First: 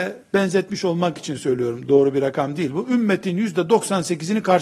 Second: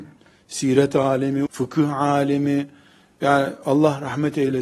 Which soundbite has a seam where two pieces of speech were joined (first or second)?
second